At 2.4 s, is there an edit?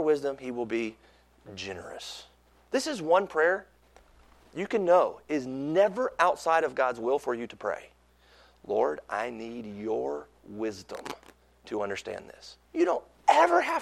no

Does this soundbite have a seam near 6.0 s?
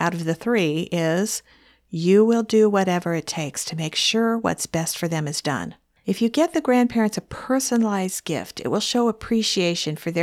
yes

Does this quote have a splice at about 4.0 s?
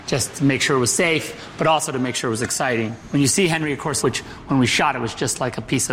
yes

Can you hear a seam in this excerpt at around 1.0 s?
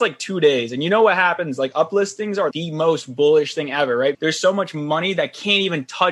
no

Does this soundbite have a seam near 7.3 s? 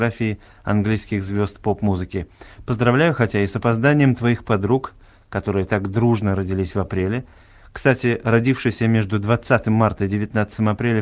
no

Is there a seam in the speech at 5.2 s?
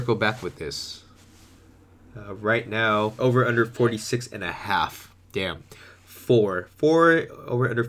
yes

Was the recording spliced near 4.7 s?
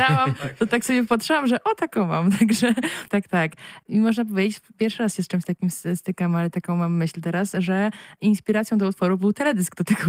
no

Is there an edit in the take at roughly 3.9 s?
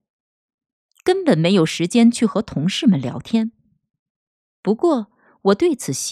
no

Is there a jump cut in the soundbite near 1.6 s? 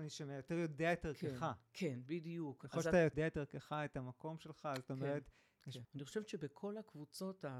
no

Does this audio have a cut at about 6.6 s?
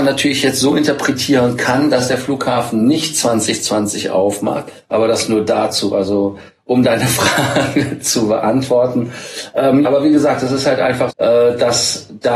no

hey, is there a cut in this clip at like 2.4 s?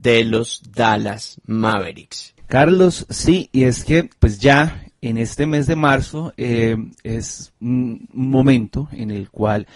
yes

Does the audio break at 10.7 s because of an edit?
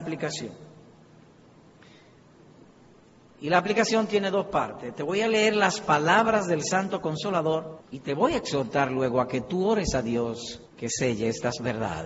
yes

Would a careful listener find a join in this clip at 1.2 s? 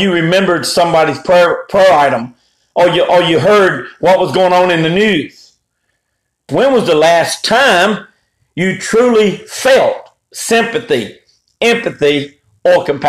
no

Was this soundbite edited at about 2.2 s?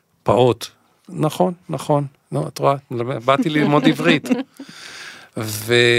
no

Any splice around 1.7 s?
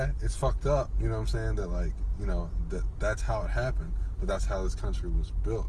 no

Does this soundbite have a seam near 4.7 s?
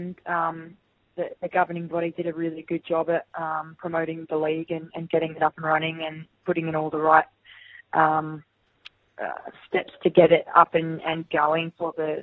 no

